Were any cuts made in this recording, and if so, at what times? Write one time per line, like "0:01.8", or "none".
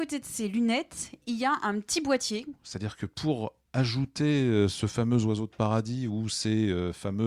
0:02.5